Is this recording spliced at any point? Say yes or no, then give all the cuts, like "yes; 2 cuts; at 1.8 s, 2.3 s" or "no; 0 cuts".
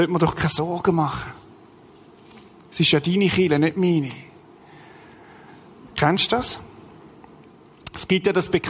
no; 0 cuts